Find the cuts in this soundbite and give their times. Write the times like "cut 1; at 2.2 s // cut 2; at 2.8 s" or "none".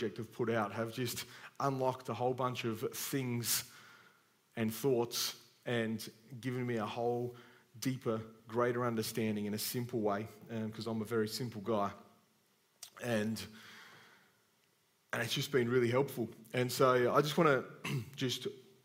none

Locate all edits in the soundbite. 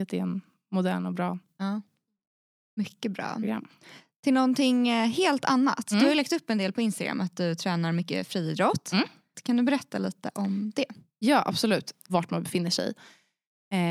cut 1; at 9.3 s // cut 2; at 12.1 s

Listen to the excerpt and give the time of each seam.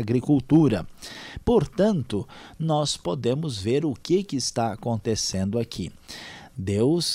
none

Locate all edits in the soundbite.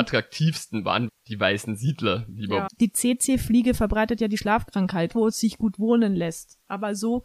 cut 1; at 1.1 s // cut 2; at 2.7 s // cut 3; at 5.1 s

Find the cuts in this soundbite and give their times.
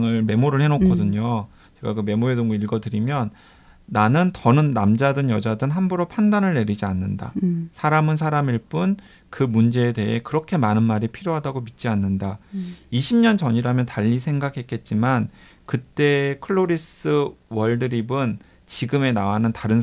none

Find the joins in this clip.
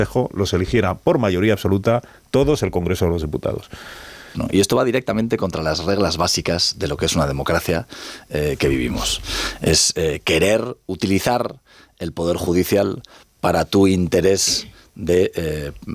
cut 1; at 4.3 s

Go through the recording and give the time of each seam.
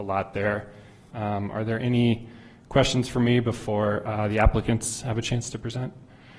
cut 1; at 1.1 s

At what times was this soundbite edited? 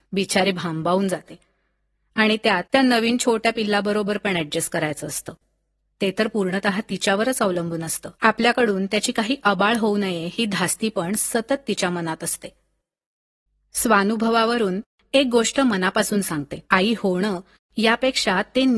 cut 1; at 2.6 s // cut 2; at 8.1 s // cut 3; at 16.6 s

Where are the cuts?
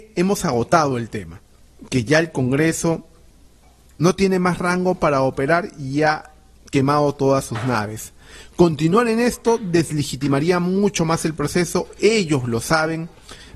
none

